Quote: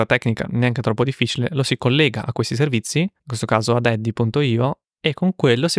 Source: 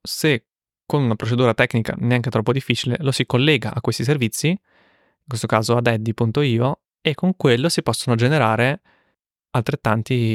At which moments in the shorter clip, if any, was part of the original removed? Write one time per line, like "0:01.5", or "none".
0:03.2